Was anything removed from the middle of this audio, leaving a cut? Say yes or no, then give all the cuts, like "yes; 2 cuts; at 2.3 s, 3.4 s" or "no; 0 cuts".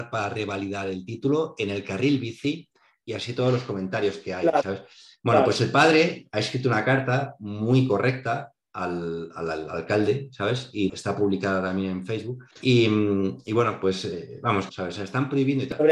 yes; 3 cuts; at 10.9 s, 12.5 s, 14.7 s